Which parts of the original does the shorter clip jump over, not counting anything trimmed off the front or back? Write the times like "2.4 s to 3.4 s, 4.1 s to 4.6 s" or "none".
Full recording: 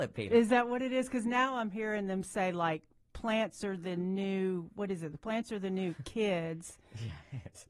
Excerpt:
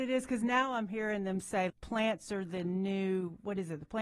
2.5 s to 3.0 s